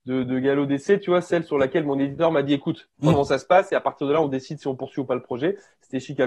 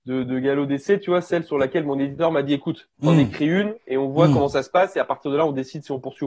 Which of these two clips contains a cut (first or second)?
first